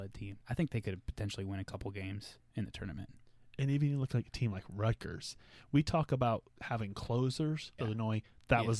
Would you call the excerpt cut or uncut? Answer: cut